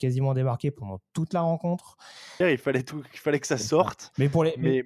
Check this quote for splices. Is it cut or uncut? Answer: cut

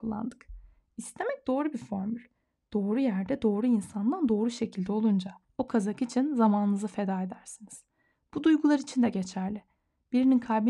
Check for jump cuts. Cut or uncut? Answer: cut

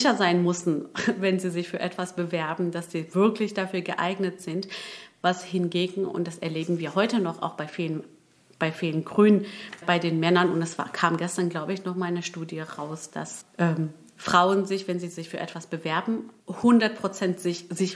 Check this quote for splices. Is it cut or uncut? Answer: cut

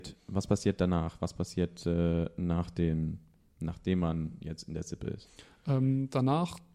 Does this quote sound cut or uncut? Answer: uncut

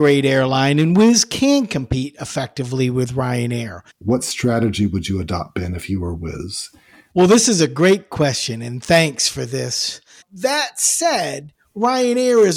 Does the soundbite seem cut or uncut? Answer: cut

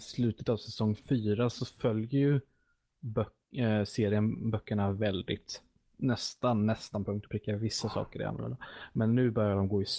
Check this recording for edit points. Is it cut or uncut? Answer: uncut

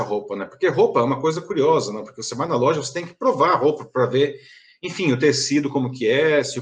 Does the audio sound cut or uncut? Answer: uncut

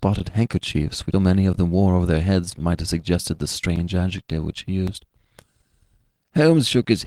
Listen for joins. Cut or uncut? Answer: cut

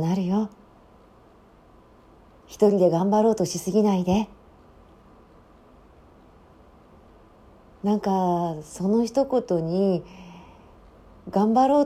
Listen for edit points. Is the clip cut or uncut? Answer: uncut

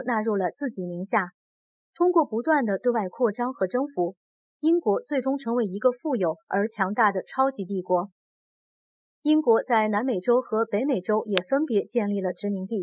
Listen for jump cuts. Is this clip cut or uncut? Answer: uncut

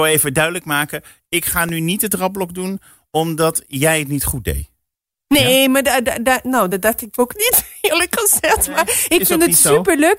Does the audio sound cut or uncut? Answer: uncut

